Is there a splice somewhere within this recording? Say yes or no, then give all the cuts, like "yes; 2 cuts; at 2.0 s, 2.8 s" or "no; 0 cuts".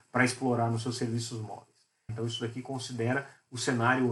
yes; 1 cut; at 2.1 s